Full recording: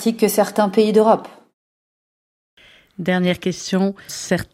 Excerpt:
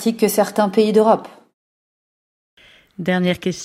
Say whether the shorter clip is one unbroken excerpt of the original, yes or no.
yes